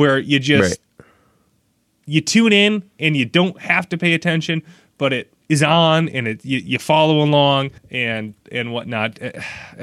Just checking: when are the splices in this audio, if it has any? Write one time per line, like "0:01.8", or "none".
0:05.4
0:07.8